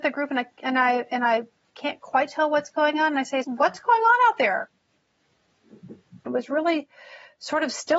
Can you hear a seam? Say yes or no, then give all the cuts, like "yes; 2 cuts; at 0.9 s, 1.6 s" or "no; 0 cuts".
yes; 2 cuts; at 3.4 s, 6.3 s